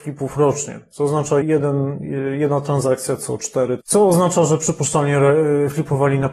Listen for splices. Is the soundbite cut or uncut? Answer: cut